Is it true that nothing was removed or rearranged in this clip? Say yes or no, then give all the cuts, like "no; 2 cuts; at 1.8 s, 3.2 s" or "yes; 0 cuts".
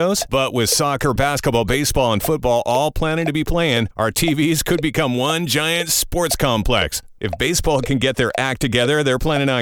yes; 0 cuts